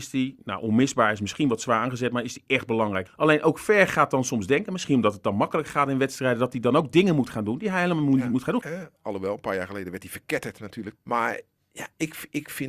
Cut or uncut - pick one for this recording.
cut